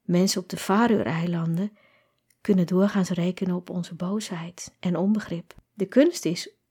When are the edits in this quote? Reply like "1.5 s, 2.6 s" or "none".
5.6 s